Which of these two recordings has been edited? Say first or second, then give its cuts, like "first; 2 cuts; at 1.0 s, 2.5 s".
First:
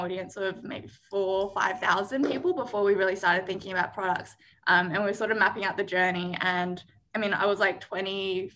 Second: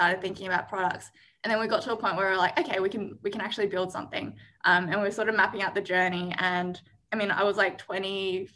first; 1 cut; at 4.5 s